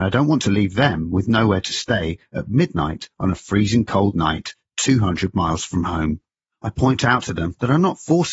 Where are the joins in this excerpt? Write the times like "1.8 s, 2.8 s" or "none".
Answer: 6.4 s